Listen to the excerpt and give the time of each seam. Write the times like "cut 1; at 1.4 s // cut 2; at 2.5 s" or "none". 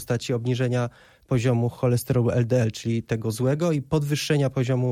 none